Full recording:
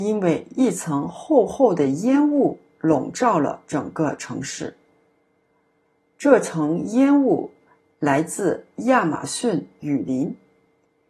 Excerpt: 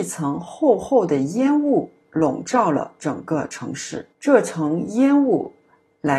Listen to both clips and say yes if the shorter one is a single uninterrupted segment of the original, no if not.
no